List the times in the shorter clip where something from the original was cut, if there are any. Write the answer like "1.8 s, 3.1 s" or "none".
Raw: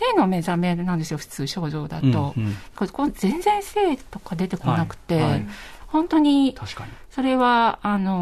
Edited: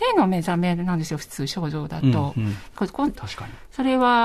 3.2 s